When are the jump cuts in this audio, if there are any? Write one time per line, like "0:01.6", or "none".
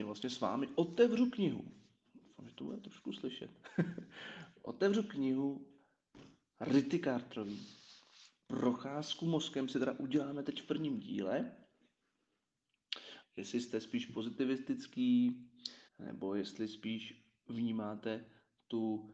0:13.2
0:15.9